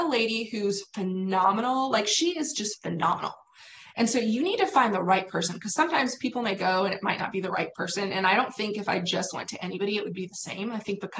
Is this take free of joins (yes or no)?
yes